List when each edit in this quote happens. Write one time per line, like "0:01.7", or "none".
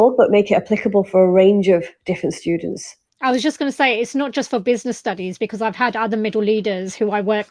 0:03.1